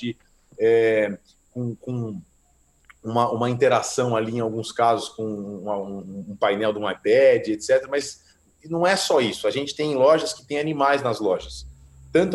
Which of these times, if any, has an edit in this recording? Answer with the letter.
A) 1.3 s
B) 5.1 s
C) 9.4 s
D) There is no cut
D